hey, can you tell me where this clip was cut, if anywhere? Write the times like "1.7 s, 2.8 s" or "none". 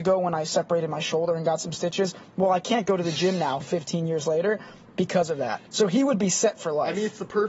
5.7 s